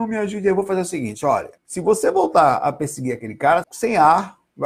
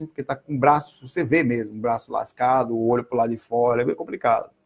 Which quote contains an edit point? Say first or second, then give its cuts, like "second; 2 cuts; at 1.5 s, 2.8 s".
first; 2 cuts; at 1.6 s, 3.6 s